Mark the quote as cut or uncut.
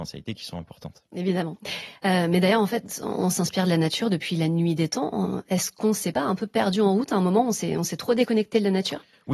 uncut